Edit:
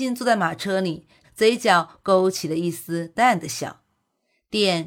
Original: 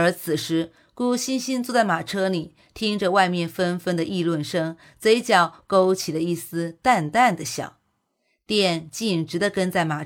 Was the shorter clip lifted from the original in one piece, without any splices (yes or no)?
no